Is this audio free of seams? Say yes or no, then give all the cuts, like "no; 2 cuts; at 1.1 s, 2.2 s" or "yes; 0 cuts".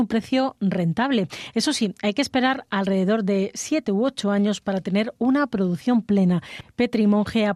yes; 0 cuts